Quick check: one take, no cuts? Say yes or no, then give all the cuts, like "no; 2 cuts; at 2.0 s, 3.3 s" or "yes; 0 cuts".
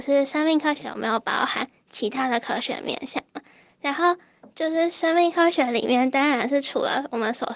yes; 0 cuts